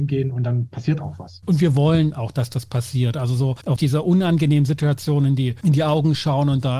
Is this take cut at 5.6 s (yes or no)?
no